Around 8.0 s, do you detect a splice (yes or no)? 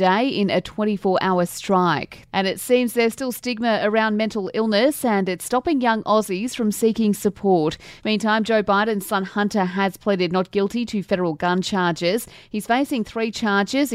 yes